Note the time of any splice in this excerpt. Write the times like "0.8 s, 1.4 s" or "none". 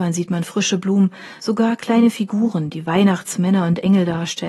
none